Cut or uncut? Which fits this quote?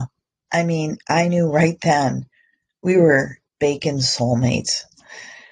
cut